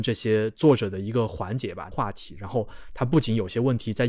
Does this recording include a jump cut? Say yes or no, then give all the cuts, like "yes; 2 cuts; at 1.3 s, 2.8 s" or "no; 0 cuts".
yes; 1 cut; at 1.9 s